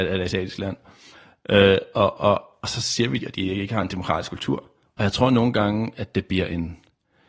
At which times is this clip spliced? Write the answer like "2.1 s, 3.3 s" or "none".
3.2 s, 4.9 s